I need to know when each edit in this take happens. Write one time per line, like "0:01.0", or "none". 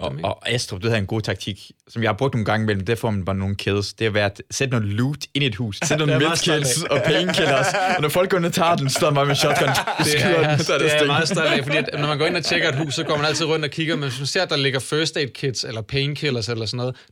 0:05.8